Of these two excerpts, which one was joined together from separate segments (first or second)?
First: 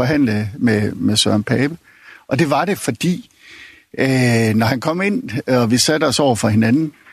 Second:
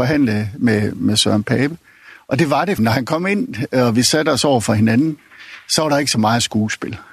second